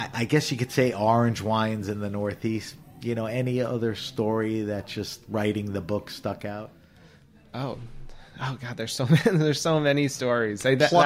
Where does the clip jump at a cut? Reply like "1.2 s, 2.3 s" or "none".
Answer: none